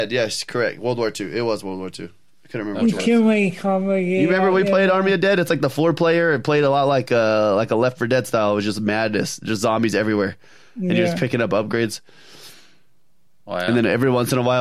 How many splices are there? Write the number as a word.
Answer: zero